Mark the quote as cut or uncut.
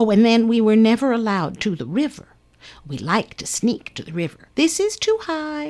cut